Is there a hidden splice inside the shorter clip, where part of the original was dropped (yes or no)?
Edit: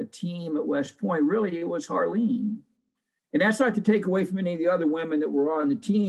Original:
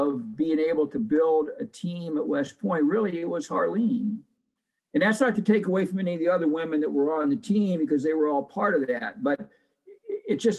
no